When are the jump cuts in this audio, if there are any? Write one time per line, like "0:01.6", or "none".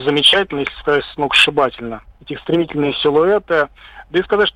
0:02.1